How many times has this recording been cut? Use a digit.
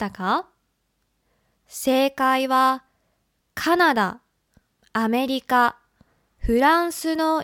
1